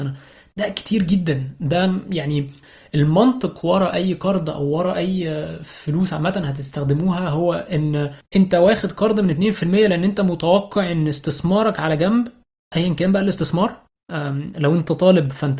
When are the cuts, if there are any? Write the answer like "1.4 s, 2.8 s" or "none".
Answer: none